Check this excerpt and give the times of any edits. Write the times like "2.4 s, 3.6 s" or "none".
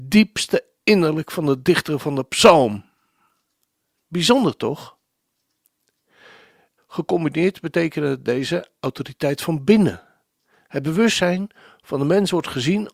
6.8 s